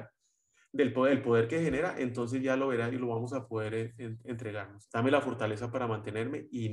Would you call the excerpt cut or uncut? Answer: cut